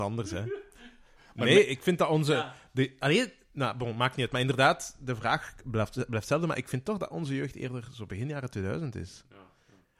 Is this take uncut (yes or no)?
yes